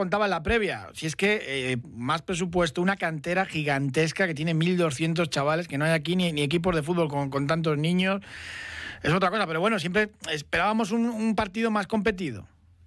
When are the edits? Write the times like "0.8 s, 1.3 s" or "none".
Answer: 1.8 s